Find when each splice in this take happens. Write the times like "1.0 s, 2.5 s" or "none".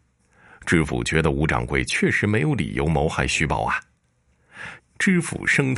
4.8 s